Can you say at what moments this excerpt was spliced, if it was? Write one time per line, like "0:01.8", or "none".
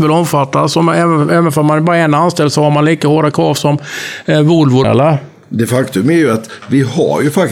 0:04.8